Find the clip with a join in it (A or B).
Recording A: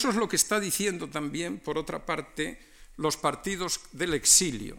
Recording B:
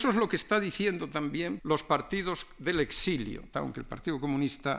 B